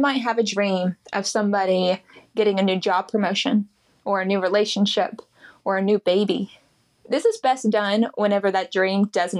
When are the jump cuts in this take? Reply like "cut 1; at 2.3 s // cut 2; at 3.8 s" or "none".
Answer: cut 1; at 7.0 s